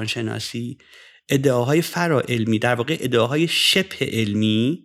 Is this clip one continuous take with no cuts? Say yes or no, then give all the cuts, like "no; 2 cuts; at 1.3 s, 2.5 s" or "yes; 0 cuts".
yes; 0 cuts